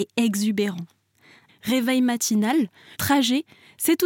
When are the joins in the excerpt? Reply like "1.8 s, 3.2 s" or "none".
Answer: 1.5 s, 2.9 s